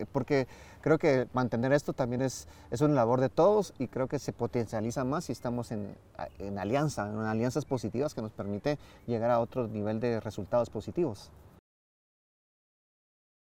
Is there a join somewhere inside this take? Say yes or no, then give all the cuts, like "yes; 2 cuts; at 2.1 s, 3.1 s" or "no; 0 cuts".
no; 0 cuts